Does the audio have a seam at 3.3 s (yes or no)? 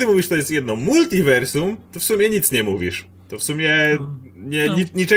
no